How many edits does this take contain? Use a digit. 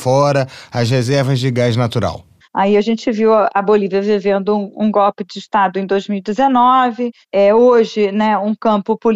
1